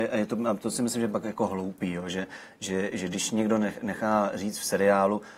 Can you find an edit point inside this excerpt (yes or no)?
no